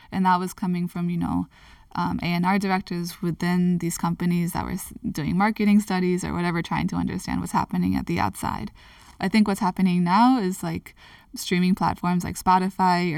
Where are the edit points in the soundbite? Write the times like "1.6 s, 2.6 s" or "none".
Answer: none